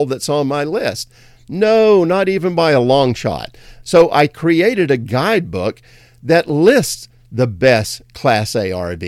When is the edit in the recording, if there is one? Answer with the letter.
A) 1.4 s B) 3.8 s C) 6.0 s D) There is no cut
B